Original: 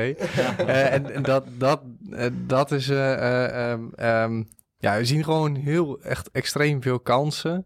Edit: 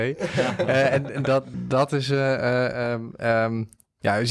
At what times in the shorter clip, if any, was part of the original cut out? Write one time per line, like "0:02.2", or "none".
0:01.5